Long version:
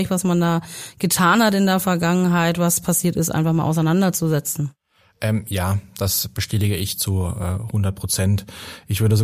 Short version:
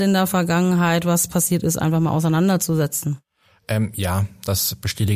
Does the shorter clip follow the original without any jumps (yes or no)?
yes